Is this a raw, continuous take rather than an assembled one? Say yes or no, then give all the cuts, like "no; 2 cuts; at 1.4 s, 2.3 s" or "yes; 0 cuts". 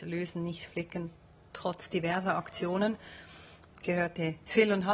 no; 1 cut; at 3.7 s